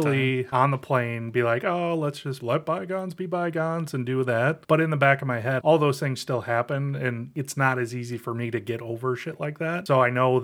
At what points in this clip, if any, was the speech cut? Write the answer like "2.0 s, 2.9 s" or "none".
5.6 s